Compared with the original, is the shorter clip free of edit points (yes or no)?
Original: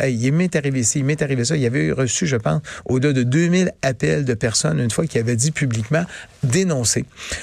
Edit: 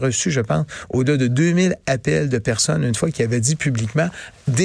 yes